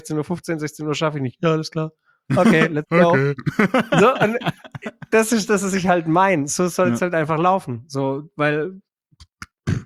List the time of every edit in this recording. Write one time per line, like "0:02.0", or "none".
none